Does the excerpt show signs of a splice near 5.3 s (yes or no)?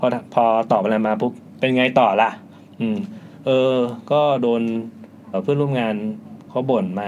yes